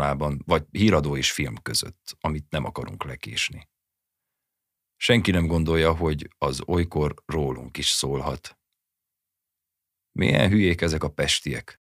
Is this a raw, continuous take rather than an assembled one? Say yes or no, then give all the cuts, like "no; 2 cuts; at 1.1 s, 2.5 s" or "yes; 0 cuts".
yes; 0 cuts